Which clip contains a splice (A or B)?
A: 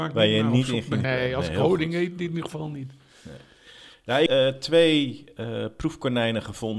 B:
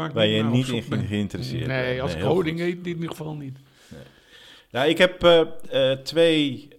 A